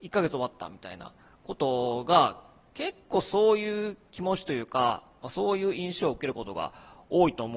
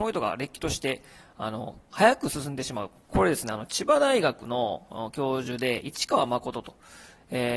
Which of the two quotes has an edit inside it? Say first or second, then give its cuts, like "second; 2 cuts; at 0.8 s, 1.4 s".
second; 1 cut; at 3.0 s